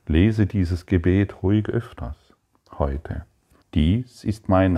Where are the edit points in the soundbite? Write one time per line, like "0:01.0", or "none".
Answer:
0:03.6